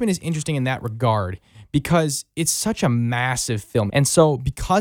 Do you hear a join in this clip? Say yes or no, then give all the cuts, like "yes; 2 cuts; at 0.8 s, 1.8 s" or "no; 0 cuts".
yes; 1 cut; at 3.9 s